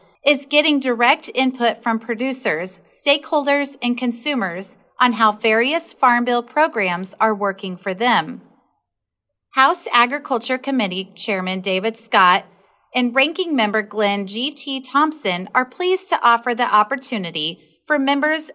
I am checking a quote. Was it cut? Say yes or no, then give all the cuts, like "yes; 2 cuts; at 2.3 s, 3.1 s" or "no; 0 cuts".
no; 0 cuts